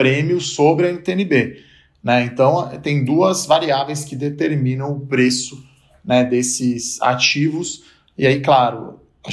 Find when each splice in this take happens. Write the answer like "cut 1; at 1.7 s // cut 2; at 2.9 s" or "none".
none